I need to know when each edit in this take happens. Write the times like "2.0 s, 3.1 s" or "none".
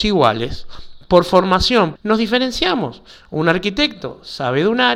2.0 s